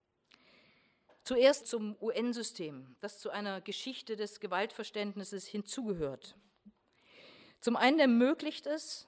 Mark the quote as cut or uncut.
cut